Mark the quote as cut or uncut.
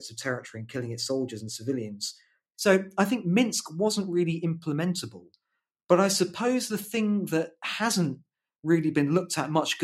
cut